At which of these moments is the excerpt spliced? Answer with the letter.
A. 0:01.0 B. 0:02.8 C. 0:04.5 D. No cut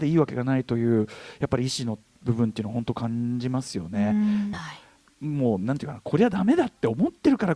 C